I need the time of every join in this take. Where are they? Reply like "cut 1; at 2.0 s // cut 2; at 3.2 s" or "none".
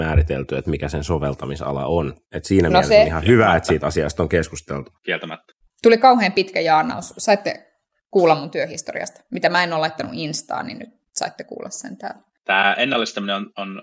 cut 1; at 5.7 s